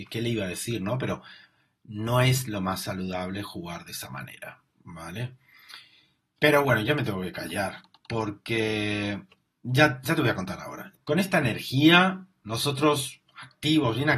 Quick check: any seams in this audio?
no; 0 cuts

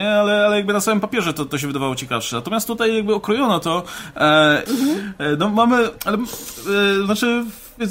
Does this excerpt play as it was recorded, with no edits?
no; 1 cut; at 4.7 s

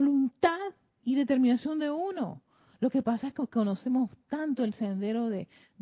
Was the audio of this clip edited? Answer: no; 0 cuts

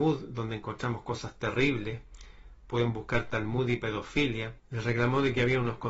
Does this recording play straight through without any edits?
no; 1 cut; at 4.6 s

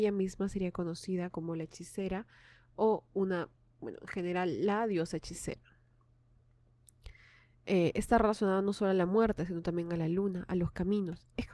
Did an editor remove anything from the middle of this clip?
no; 0 cuts

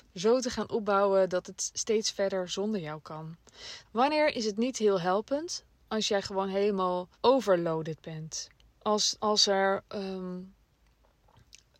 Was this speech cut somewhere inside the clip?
yes; 3 cuts; at 3.8 s, 7.1 s, 8.7 s

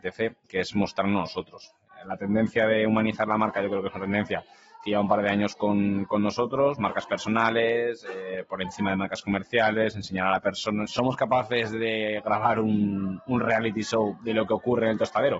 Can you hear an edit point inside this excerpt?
yes; 1 cut; at 10.8 s

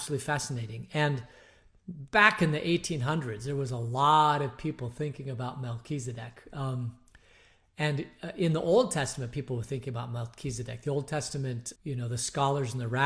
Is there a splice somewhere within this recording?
yes; 1 cut; at 11.8 s

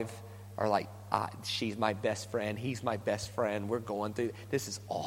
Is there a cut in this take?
no; 0 cuts

